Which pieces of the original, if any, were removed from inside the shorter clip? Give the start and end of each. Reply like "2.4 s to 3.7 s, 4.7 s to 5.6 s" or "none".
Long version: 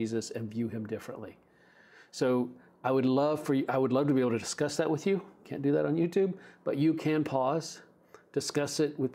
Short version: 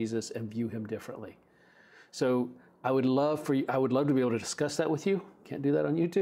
none